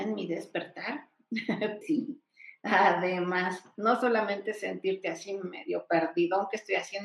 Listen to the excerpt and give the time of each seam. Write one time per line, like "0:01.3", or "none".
0:01.8